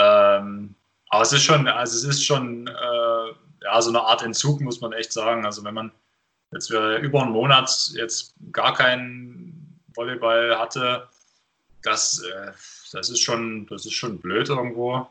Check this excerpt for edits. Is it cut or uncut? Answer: uncut